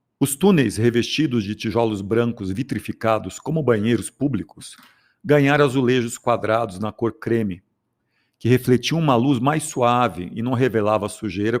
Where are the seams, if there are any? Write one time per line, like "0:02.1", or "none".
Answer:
none